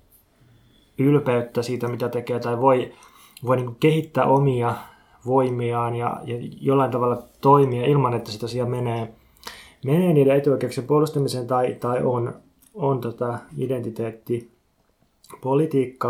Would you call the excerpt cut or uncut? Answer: uncut